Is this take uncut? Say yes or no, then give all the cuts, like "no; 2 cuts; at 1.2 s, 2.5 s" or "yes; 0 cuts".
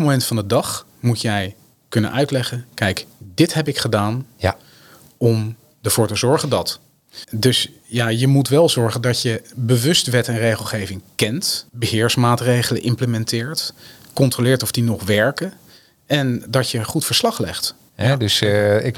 no; 3 cuts; at 7.2 s, 11.7 s, 17.9 s